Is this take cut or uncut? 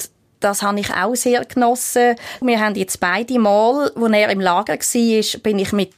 cut